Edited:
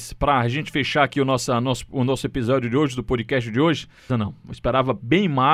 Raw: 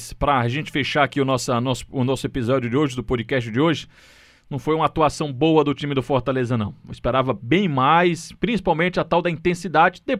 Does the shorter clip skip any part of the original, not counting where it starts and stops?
yes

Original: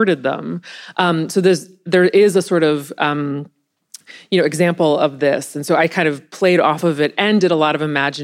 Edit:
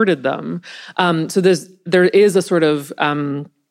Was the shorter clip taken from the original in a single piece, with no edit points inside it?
yes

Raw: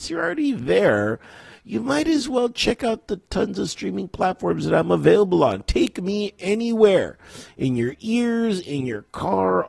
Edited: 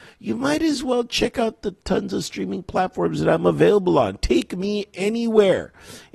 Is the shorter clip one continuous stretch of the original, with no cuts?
yes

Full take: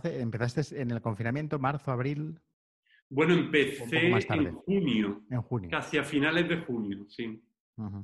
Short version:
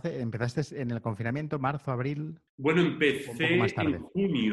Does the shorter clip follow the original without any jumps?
no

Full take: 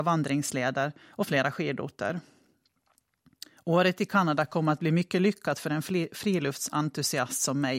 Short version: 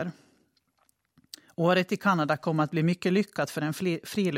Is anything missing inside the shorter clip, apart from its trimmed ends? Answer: no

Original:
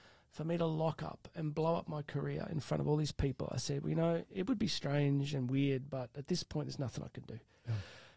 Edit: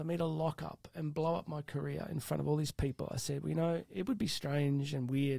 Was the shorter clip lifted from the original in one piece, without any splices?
yes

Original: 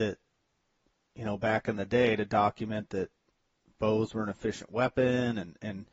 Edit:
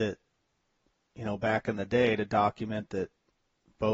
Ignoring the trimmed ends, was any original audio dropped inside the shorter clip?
no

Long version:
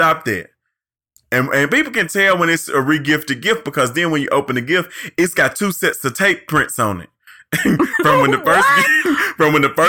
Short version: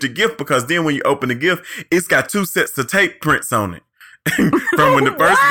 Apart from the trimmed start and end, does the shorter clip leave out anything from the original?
no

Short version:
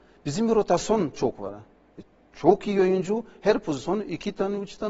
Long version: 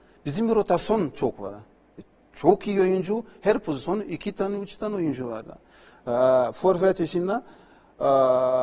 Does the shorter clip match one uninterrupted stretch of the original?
yes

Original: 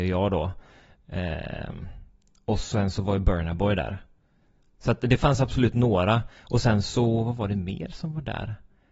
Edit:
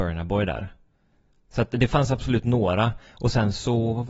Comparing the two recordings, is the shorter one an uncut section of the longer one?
yes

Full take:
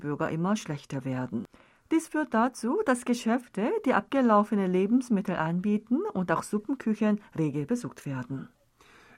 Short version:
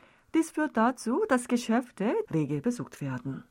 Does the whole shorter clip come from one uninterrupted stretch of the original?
no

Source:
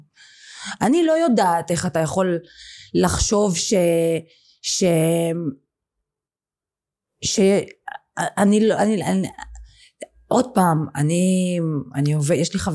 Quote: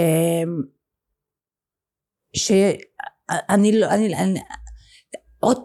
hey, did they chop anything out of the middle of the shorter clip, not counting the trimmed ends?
no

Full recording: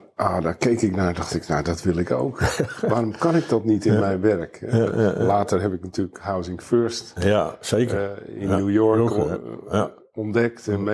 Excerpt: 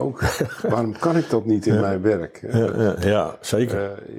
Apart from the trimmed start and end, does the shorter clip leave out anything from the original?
yes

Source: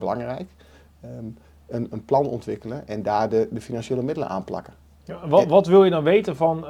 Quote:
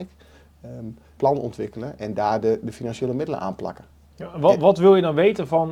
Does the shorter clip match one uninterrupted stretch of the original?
no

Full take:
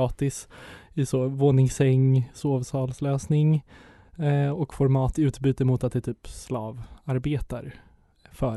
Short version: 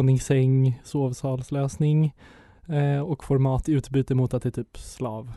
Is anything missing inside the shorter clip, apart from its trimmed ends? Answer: no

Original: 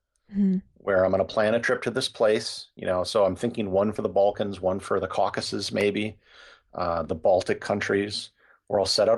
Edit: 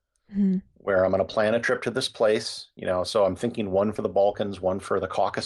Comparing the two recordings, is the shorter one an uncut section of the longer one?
yes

